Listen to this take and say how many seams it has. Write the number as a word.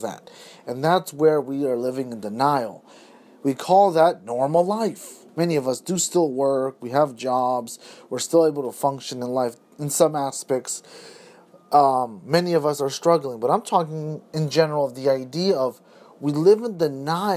one